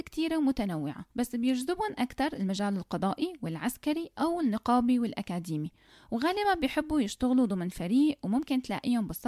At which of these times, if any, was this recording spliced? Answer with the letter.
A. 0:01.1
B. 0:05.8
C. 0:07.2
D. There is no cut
A